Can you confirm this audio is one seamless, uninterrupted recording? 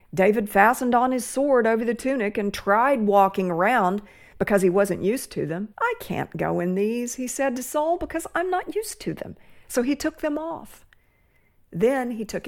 no; 1 cut; at 5.7 s

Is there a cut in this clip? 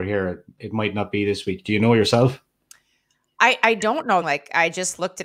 yes; 1 cut; at 4.2 s

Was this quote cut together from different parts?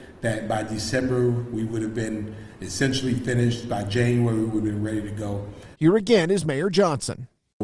yes; 1 cut; at 5.7 s

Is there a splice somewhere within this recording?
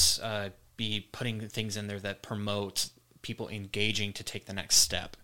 no; 0 cuts

